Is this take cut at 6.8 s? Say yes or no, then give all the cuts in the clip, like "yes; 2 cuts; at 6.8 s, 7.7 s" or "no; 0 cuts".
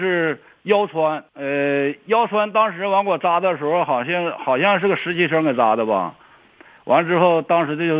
no; 0 cuts